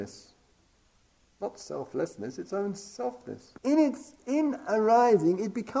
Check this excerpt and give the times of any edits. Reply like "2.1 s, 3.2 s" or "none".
3.6 s